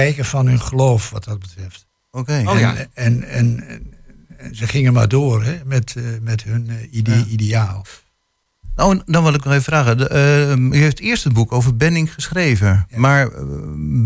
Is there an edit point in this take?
no; 0 cuts

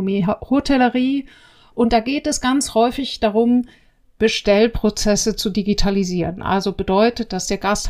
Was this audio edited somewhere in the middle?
no; 0 cuts

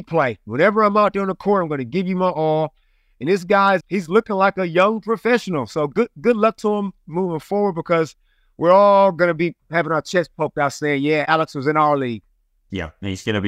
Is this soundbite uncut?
no; 1 cut; at 3.8 s

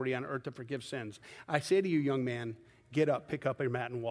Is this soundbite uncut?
yes; 0 cuts

